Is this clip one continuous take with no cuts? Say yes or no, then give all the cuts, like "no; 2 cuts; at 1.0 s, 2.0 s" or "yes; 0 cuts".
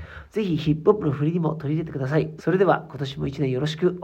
no; 1 cut; at 2.4 s